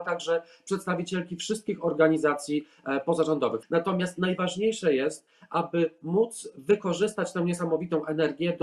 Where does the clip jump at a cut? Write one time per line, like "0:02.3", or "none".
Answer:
0:03.6